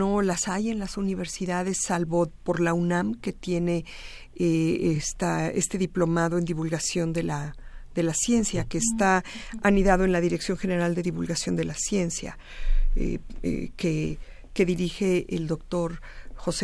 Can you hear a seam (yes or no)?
no